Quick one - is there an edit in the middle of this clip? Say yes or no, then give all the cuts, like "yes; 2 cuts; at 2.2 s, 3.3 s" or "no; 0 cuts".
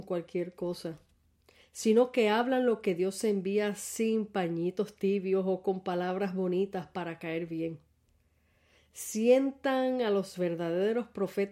yes; 1 cut; at 8.8 s